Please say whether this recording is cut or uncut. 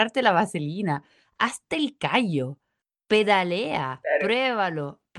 uncut